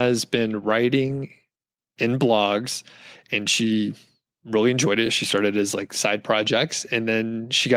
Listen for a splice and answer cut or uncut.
uncut